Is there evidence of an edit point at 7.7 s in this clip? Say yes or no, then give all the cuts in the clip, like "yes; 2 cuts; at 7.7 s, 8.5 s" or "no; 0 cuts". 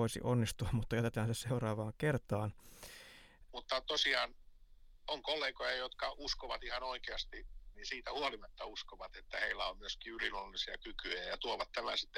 yes; 2 cuts; at 3.5 s, 7.7 s